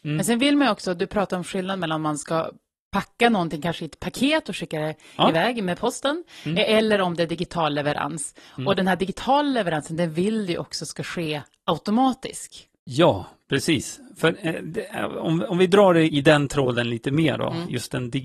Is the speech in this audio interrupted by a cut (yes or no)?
yes